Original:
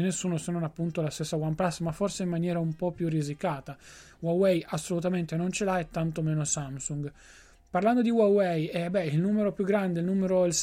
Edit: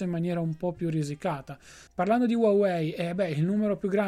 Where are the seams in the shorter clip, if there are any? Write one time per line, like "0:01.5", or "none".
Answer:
0:01.9